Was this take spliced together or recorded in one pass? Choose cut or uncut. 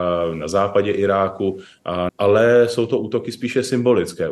cut